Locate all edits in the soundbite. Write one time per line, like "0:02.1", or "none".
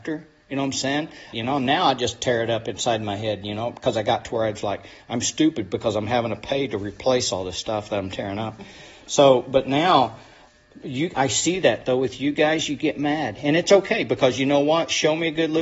0:01.3